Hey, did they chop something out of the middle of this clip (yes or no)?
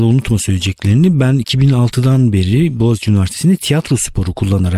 no